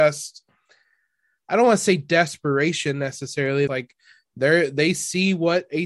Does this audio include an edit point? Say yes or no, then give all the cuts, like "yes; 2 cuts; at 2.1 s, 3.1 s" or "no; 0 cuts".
yes; 1 cut; at 3.7 s